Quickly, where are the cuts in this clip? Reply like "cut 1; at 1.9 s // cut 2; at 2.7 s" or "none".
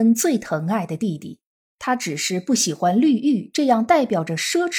cut 1; at 1.7 s